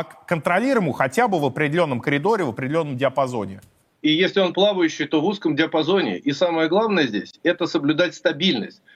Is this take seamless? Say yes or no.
no